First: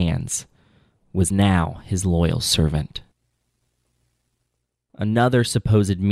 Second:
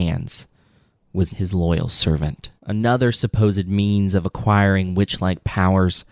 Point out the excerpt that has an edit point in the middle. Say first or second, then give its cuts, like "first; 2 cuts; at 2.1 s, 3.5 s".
second; 2 cuts; at 1.3 s, 2.6 s